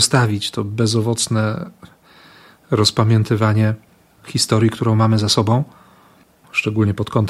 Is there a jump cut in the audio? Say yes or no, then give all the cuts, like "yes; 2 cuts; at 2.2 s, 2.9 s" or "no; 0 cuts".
no; 0 cuts